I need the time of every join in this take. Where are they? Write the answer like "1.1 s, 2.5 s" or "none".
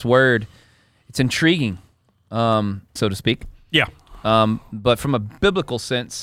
3.0 s